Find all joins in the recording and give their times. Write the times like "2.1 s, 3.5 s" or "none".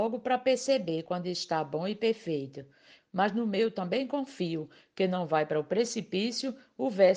3.0 s